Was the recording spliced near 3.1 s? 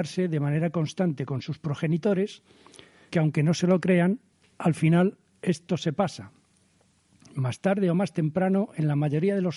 yes; 1 cut; at 3.1 s

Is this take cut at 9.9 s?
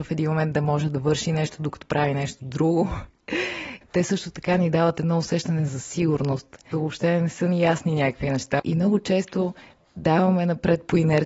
no; 3 cuts; at 3.8 s, 6.7 s, 8.6 s

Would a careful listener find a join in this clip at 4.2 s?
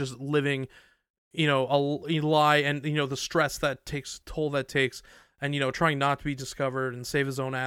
yes; 1 cut; at 4.2 s

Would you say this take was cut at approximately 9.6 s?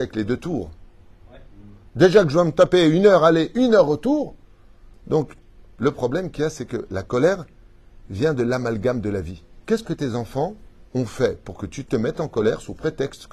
no; 1 cut; at 1.9 s

